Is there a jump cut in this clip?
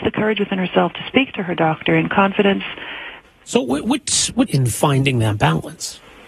yes; 2 cuts; at 3.2 s, 4.5 s

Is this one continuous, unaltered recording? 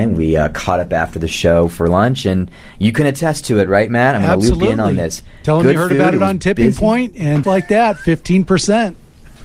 no; 1 cut; at 7.4 s

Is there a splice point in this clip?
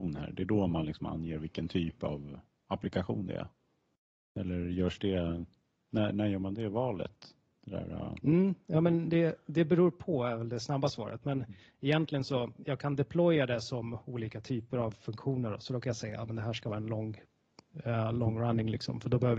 no; 0 cuts

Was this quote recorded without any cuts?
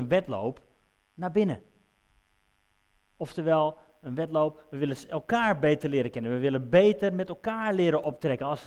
yes; 0 cuts

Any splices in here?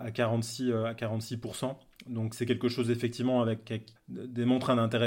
yes; 2 cuts; at 2.3 s, 4.0 s

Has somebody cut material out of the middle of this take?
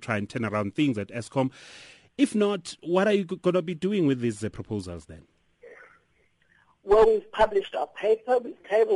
no; 0 cuts

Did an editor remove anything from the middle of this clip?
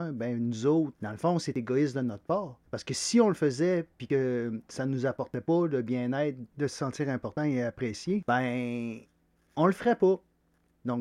yes; 1 cut; at 0.9 s

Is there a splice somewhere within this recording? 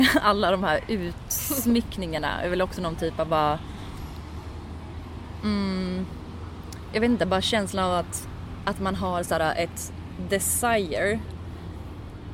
yes; 1 cut; at 6.9 s

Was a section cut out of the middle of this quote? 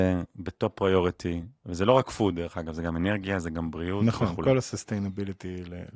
no; 0 cuts

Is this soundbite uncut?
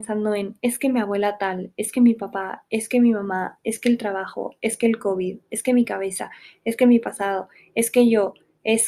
yes; 0 cuts

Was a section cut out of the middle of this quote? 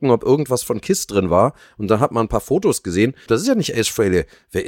yes; 1 cut; at 3.3 s

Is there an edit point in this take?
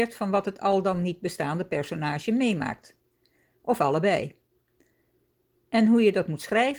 no; 0 cuts

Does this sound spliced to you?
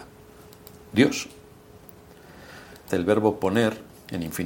yes; 1 cut; at 2.9 s

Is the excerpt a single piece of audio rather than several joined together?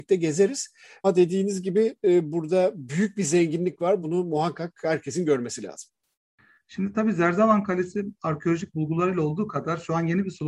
yes; 0 cuts

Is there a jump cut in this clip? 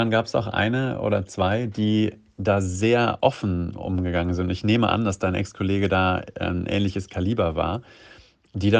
no; 0 cuts

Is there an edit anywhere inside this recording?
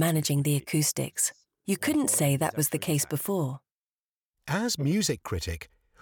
no; 0 cuts

